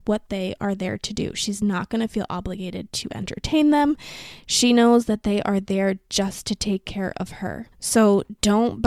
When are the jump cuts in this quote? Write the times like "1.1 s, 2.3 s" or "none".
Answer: 7.7 s